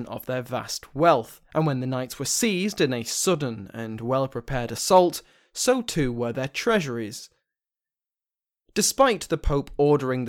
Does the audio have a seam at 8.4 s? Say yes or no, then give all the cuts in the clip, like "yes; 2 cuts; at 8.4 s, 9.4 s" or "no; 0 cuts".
no; 1 cut; at 1.4 s